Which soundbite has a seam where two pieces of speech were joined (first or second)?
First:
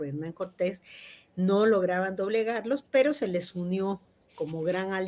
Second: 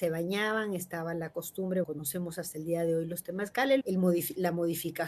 second